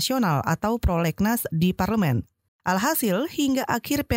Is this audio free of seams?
no; 1 cut; at 2.5 s

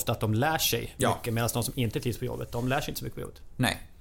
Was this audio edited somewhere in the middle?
no; 0 cuts

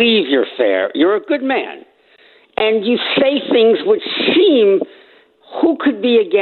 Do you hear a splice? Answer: no; 0 cuts

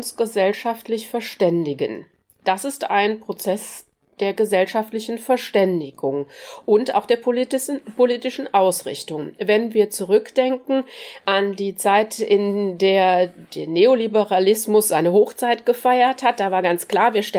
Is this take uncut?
yes; 0 cuts

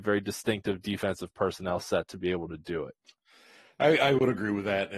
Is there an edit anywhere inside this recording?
no; 0 cuts

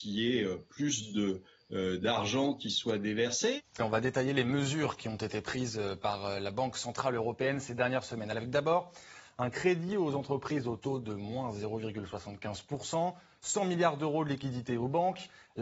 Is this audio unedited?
no; 1 cut; at 3.8 s

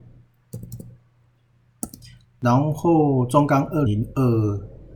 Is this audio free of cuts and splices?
no; 2 cuts; at 2.2 s, 3.9 s

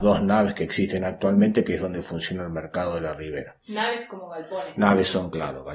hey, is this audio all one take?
yes; 0 cuts

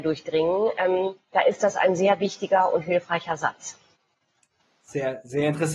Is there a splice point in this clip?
no; 0 cuts

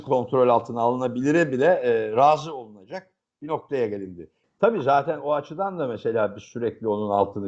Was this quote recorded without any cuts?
no; 1 cut; at 4.4 s

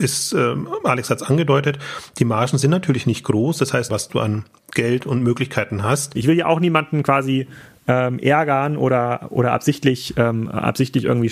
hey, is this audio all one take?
no; 2 cuts; at 3.9 s, 6.1 s

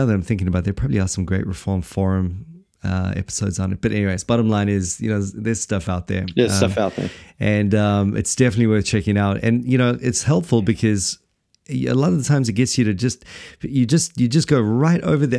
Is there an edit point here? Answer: no; 0 cuts

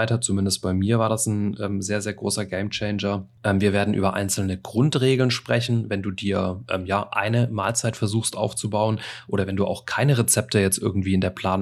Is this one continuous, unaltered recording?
yes; 0 cuts

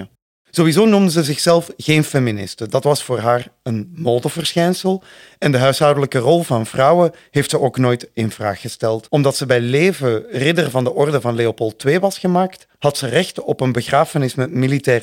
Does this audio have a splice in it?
yes; 1 cut; at 12.8 s

